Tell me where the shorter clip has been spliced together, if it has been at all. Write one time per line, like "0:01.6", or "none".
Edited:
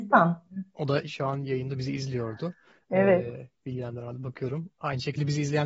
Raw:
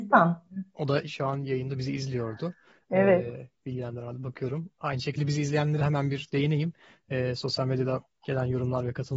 none